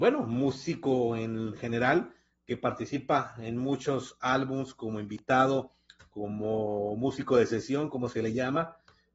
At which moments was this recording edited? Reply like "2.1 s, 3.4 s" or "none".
none